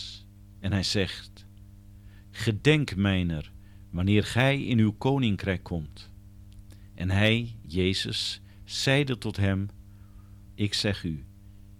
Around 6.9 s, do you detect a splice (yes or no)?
no